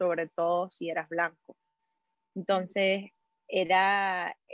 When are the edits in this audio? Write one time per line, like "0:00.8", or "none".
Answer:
none